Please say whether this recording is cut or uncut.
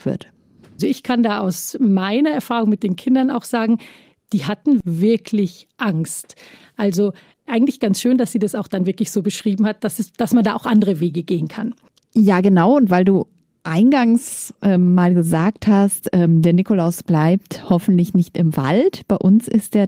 uncut